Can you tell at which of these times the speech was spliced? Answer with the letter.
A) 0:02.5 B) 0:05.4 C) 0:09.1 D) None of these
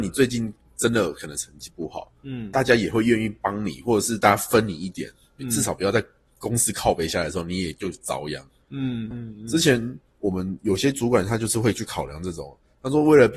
C